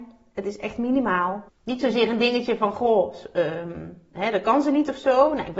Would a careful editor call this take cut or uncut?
cut